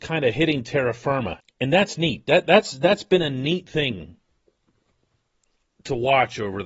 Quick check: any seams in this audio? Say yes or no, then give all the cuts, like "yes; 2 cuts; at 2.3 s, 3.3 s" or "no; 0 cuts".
yes; 1 cut; at 1.4 s